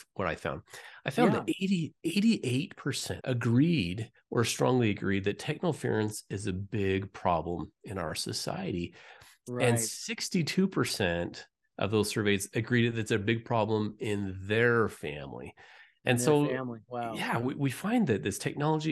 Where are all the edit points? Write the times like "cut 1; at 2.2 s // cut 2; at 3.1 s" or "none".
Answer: cut 1; at 3.2 s